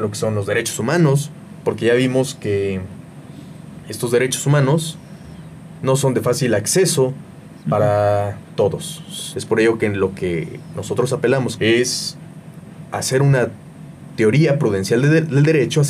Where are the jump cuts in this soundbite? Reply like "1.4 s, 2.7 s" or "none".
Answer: 9.3 s, 11.6 s